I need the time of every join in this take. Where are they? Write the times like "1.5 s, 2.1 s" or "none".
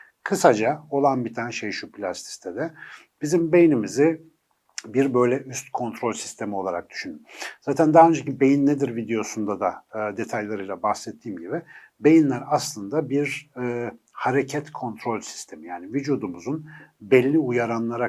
none